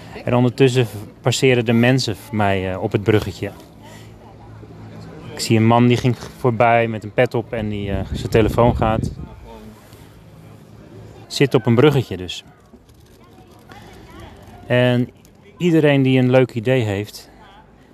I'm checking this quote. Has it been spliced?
yes; 1 cut; at 11.2 s

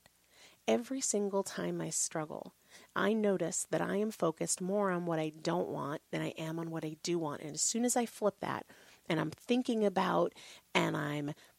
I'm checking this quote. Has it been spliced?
no; 0 cuts

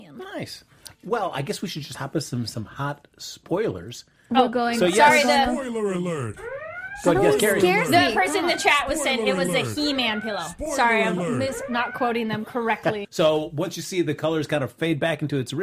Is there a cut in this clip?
yes; 2 cuts; at 0.9 s, 13.0 s

